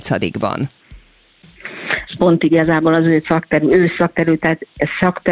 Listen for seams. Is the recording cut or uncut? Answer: cut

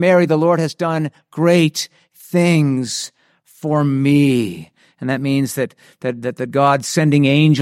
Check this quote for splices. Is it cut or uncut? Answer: uncut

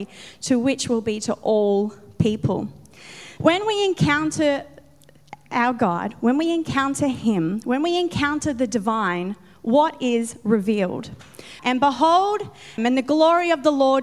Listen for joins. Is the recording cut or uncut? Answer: cut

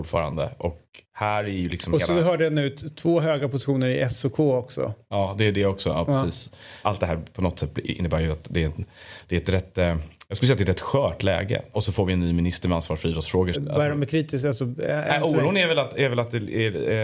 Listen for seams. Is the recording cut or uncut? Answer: cut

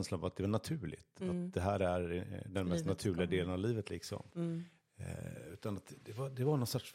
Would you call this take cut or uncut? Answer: uncut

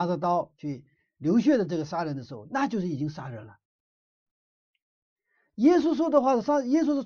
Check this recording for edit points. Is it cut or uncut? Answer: cut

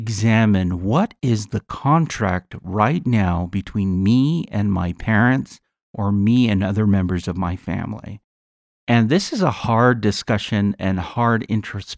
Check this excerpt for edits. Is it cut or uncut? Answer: uncut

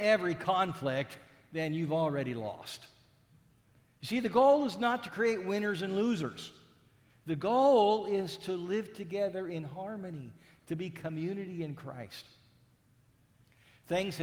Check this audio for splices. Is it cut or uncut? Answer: uncut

